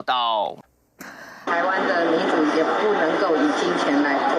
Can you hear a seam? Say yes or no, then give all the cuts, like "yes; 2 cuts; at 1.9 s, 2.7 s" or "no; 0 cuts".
yes; 1 cut; at 1.5 s